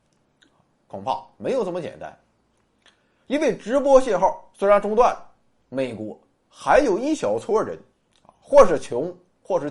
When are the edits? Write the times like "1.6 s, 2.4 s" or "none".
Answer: 5.6 s